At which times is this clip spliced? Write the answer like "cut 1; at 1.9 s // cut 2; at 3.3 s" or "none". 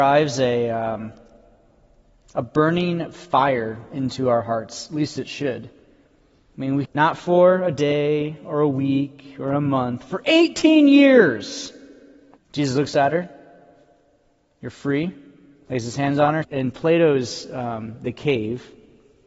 cut 1; at 6.9 s // cut 2; at 12.4 s // cut 3; at 16.4 s

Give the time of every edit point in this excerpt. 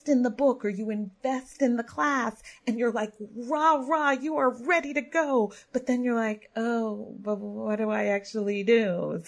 none

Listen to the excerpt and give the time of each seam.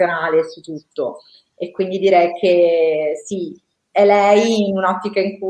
none

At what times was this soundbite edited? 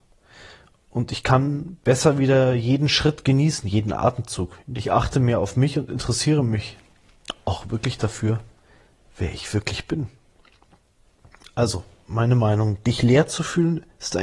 cut 1; at 4.6 s

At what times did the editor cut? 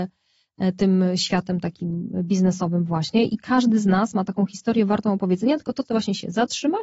cut 1; at 5.8 s

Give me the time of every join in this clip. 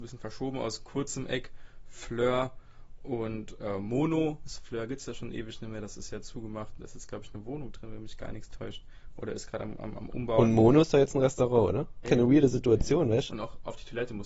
cut 1; at 12.0 s // cut 2; at 13.3 s

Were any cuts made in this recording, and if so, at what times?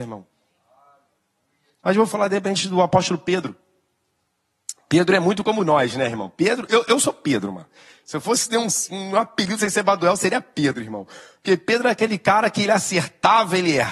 cut 1; at 1.8 s

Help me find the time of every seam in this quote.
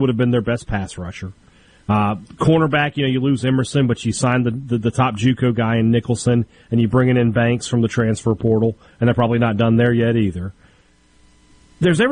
none

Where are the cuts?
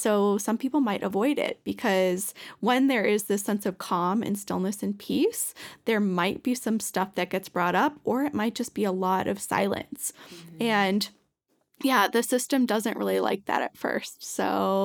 none

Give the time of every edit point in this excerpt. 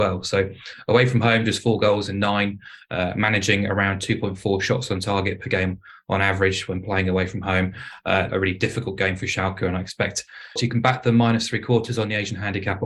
cut 1; at 8.3 s // cut 2; at 10.6 s

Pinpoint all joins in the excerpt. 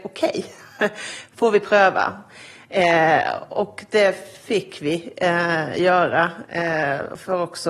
none

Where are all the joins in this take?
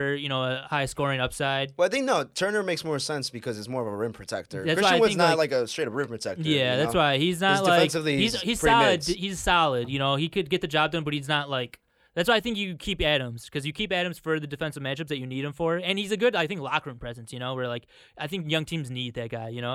none

